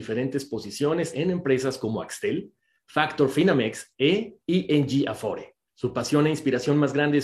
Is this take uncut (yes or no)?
no